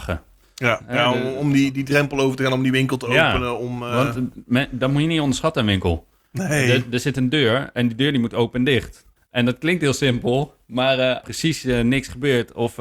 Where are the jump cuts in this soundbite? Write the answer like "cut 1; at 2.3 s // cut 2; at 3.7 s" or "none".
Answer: cut 1; at 9.2 s // cut 2; at 11.2 s

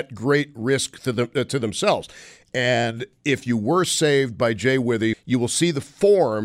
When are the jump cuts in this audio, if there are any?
cut 1; at 2.4 s // cut 2; at 5.1 s

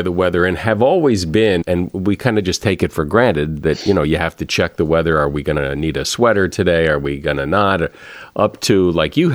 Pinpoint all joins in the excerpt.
cut 1; at 1.6 s

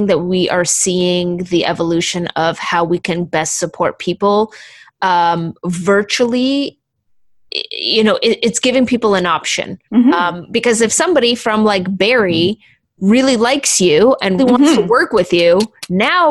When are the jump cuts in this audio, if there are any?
cut 1; at 9.8 s // cut 2; at 14.4 s

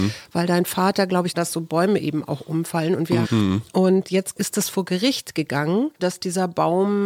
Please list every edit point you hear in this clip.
cut 1; at 1.3 s // cut 2; at 3.2 s // cut 3; at 6.0 s

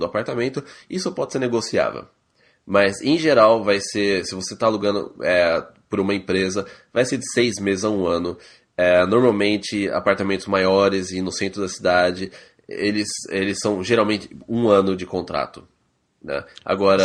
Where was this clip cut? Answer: cut 1; at 15.0 s

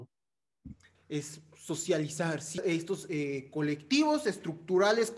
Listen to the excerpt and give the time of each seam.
cut 1; at 1.0 s // cut 2; at 2.6 s

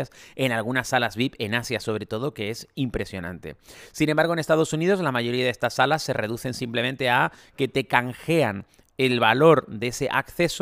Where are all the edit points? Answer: none

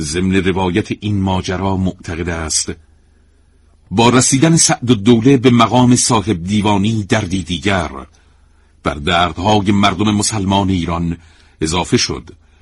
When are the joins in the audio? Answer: none

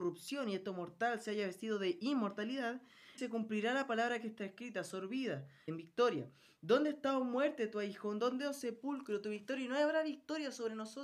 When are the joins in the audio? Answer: cut 1; at 3.2 s // cut 2; at 5.7 s

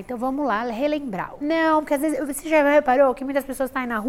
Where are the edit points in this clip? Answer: cut 1; at 1.4 s

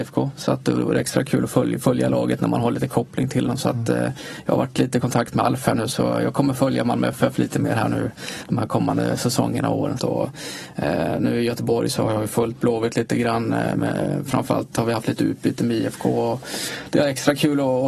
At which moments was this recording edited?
cut 1; at 10.0 s

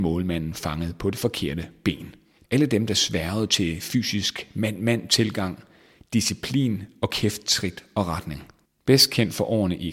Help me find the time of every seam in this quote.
cut 1; at 2.4 s // cut 2; at 8.6 s

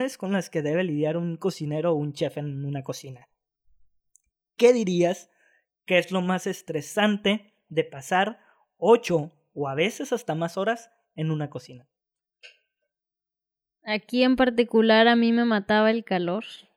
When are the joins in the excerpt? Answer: cut 1; at 13.8 s

